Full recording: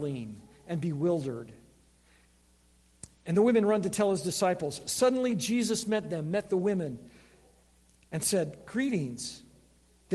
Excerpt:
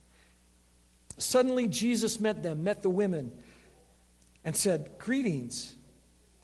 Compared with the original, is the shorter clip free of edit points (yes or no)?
no